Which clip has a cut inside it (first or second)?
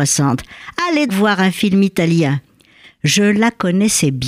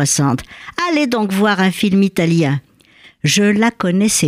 first